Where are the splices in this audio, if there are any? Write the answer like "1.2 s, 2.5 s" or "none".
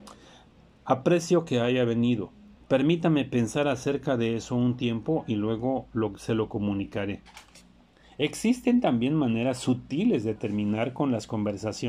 2.6 s